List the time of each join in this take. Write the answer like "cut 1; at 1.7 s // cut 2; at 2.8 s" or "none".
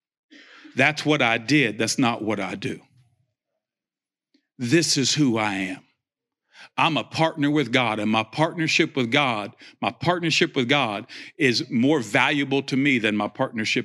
none